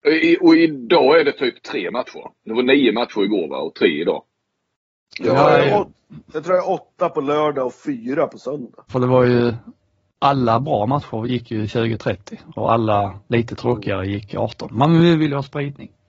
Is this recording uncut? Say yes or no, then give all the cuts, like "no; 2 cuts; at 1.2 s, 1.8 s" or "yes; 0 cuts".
no; 2 cuts; at 8.9 s, 13.2 s